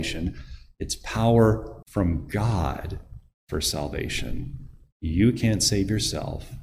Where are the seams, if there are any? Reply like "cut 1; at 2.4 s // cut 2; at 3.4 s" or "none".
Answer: cut 1; at 1.8 s